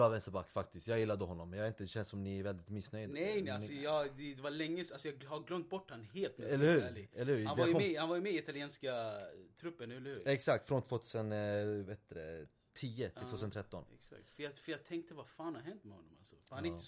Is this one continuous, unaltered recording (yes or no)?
yes